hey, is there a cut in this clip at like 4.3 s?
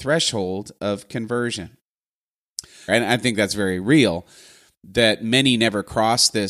no; 1 cut; at 2.9 s

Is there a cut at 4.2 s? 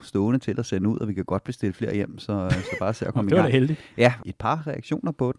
yes; 1 cut; at 4.2 s

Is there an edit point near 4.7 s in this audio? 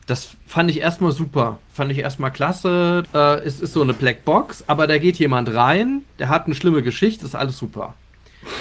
no; 2 cuts; at 3.0 s, 7.2 s

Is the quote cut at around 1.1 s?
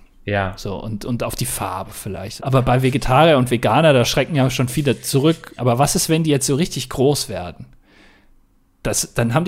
no; 2 cuts; at 2.4 s, 5.6 s

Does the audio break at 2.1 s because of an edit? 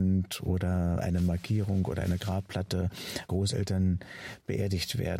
no; 1 cut; at 3.3 s

